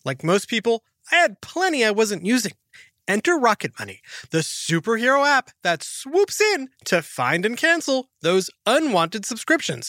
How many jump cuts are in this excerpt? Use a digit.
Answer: 0